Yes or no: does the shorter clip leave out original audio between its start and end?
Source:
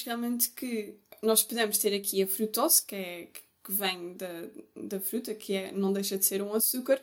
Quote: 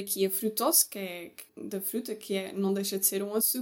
yes